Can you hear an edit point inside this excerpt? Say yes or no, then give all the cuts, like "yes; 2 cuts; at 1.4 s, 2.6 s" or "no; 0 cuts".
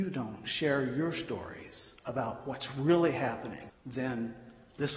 yes; 1 cut; at 3.7 s